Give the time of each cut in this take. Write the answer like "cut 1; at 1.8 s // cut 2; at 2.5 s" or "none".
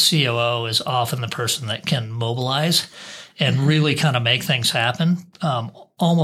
cut 1; at 5.3 s